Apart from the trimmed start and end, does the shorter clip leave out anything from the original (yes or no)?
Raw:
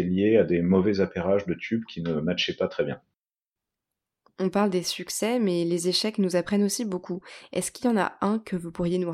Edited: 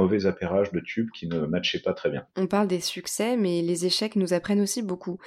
yes